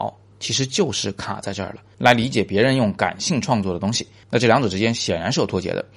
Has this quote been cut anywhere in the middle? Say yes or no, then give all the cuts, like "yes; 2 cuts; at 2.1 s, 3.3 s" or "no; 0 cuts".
yes; 1 cut; at 1.9 s